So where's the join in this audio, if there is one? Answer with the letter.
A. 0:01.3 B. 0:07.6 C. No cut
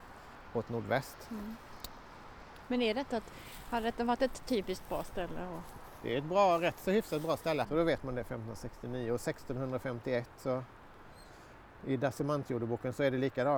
B